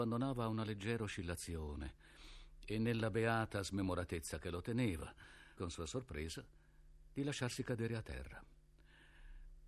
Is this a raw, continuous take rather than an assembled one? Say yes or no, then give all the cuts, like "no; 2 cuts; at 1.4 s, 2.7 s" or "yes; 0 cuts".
no; 1 cut; at 5.6 s